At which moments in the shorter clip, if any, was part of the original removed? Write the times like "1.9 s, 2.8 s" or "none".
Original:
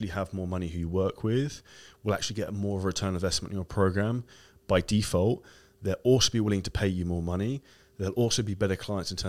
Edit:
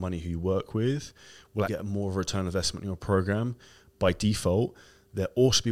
1.7 s